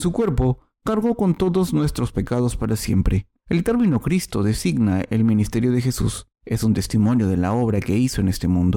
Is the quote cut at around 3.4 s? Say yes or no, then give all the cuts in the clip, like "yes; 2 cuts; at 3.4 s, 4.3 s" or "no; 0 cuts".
yes; 2 cuts; at 3.4 s, 6.3 s